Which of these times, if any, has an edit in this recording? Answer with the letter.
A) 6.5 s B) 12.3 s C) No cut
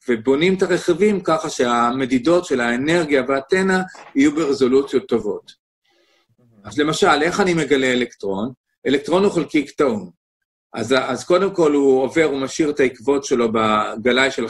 C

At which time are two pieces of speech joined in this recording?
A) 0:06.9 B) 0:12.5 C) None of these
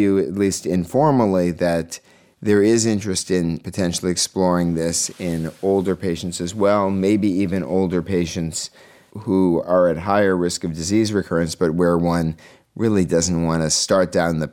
C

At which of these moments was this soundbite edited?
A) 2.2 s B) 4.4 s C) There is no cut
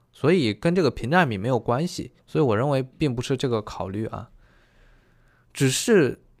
A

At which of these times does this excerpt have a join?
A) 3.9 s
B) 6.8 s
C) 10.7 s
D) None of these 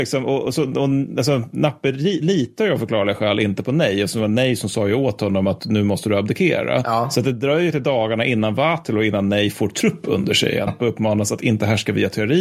C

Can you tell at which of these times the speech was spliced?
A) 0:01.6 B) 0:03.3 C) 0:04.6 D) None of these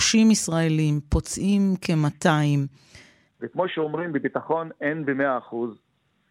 B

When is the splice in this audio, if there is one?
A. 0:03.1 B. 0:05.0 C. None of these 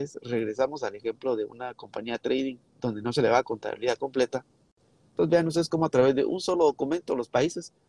B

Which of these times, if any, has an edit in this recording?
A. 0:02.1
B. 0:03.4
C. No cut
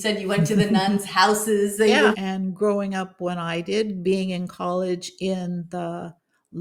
A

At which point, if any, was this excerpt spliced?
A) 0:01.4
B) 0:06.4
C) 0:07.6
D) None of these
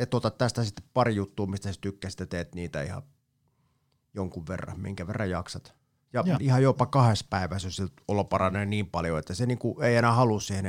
B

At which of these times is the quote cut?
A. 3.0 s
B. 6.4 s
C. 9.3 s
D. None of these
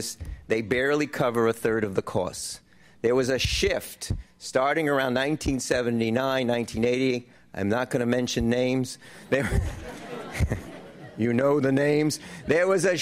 D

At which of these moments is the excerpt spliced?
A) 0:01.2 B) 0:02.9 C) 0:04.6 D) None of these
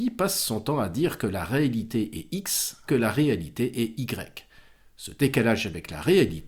B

